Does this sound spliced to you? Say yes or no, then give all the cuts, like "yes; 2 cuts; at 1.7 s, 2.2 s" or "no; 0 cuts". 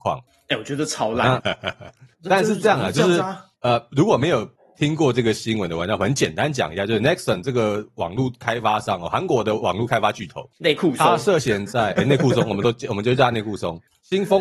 yes; 1 cut; at 1.4 s